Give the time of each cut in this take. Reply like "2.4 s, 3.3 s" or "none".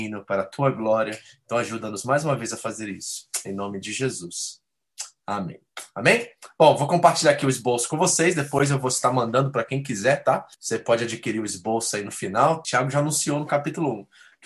10.5 s, 12.6 s